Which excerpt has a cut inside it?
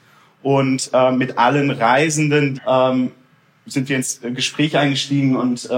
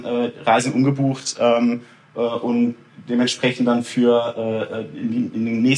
first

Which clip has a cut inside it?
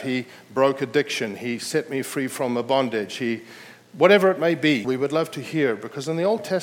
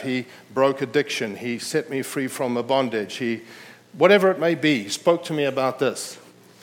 first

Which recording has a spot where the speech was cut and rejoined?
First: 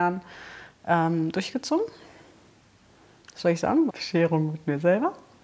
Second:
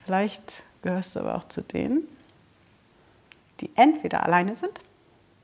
first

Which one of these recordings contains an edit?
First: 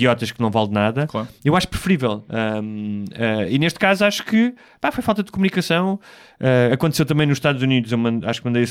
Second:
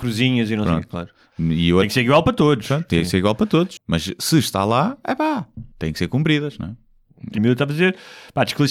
second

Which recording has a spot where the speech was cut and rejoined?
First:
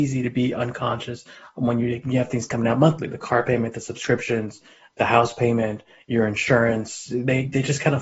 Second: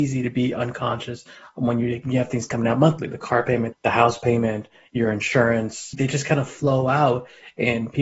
second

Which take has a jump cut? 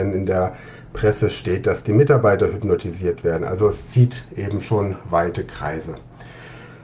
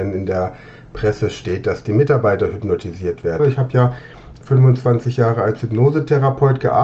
second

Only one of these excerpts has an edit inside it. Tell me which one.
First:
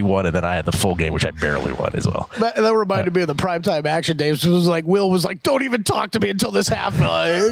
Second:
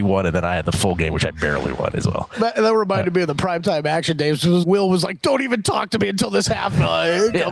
second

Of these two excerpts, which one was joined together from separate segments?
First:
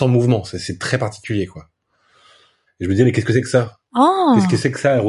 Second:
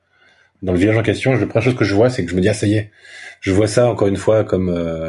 first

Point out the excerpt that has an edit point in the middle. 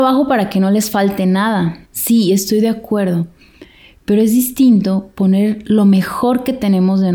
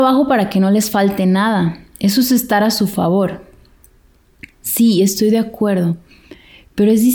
first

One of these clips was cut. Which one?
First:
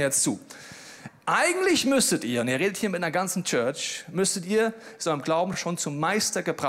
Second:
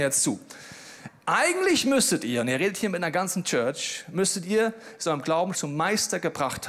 second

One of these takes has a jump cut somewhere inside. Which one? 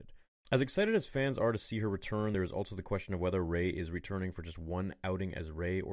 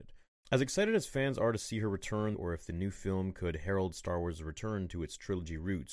second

